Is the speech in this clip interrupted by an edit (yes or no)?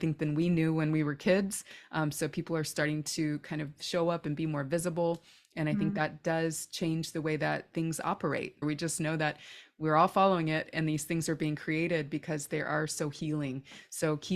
yes